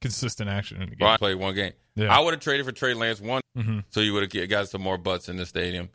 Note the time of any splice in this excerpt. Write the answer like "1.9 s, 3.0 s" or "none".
1.2 s, 3.4 s